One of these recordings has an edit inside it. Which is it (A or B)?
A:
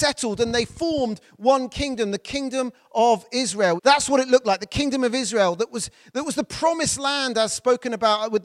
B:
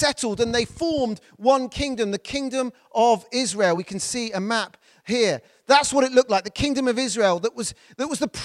A